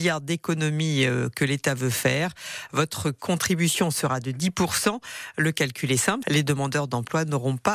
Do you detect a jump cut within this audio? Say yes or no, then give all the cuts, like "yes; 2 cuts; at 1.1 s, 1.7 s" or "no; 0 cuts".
yes; 1 cut; at 6.2 s